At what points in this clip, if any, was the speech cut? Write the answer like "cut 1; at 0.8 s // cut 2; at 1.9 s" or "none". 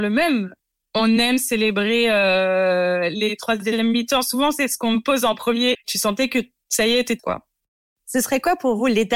cut 1; at 5.7 s // cut 2; at 7.2 s